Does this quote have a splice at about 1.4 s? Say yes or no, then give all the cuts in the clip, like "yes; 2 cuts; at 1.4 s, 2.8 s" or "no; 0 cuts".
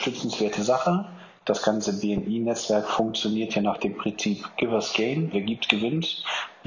no; 1 cut; at 5.3 s